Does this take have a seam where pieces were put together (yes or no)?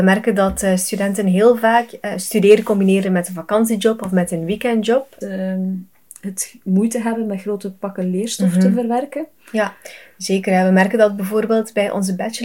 yes